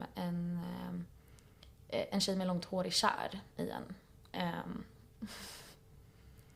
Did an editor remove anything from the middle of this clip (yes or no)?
no